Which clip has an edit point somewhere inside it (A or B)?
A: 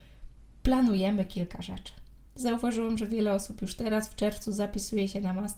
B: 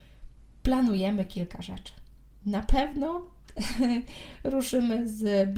A